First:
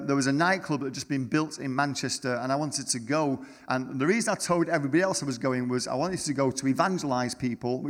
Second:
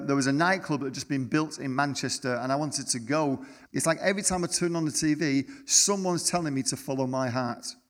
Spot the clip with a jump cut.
second; 1 cut; at 3.7 s

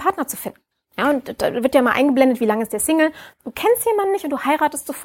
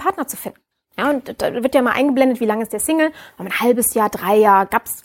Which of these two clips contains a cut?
first; 1 cut; at 3.3 s

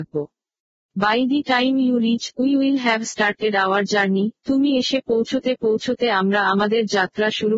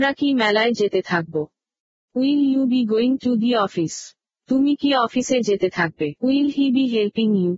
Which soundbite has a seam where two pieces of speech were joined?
second; 1 cut; at 6.2 s

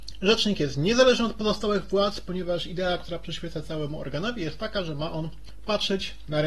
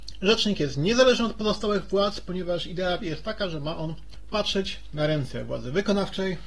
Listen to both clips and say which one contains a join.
second; 1 cut; at 3.0 s

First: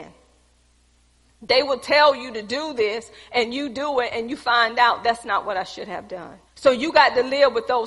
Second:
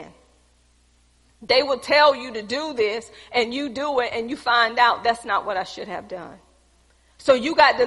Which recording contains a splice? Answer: first; 1 cut; at 6.5 s

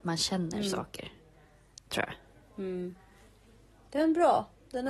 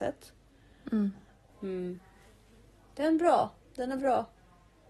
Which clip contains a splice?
second; 1 cut; at 1.5 s

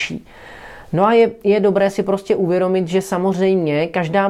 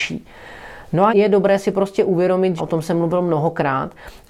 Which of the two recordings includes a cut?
second; 2 cuts; at 1.1 s, 2.6 s

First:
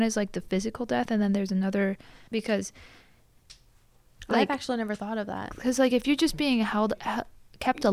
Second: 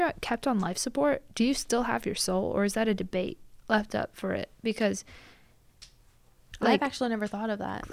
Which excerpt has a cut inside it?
first; 1 cut; at 2.3 s

